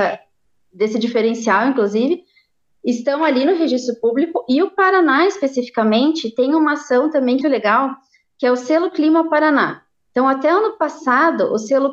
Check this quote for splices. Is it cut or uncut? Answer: cut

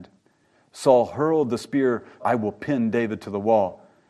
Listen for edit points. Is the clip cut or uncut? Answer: cut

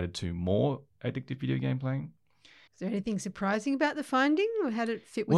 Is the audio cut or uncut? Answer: cut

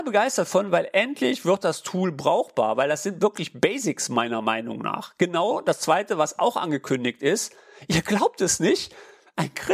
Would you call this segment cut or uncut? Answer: uncut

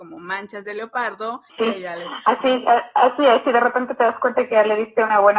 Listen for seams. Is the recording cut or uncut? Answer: cut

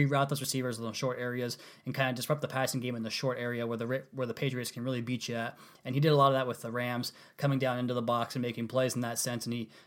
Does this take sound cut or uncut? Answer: uncut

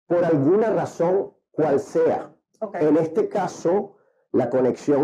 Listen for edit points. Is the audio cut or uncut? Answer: uncut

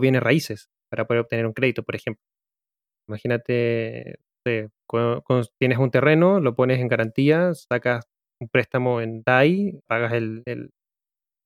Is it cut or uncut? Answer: cut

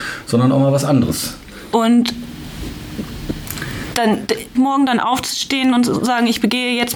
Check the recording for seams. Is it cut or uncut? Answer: cut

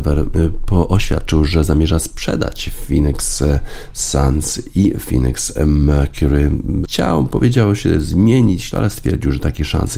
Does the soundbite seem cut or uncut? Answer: cut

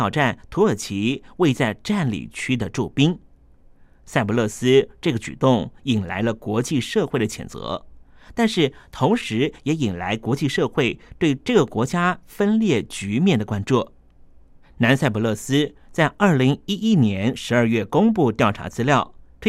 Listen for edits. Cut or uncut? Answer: cut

